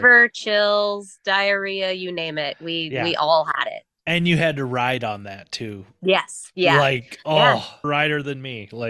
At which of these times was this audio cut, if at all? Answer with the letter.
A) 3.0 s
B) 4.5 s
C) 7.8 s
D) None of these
C